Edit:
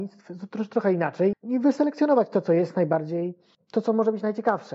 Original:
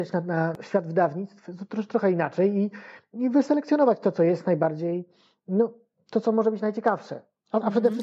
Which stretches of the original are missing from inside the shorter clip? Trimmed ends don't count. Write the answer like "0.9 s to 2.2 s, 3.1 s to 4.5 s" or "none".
2.5 s to 3.0 s, 5.3 s to 5.9 s